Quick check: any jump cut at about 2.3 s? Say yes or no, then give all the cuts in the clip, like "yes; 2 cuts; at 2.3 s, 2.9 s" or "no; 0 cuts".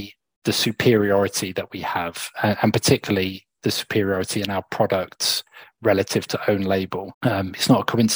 no; 1 cut; at 7.1 s